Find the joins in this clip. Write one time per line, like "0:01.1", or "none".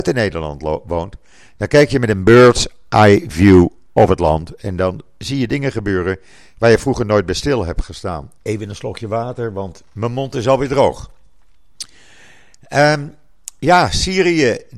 0:08.4